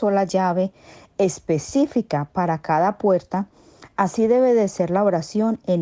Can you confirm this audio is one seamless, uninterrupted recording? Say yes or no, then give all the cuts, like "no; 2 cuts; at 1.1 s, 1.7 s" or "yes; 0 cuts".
yes; 0 cuts